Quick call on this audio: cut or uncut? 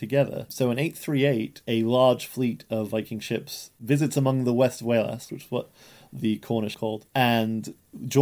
cut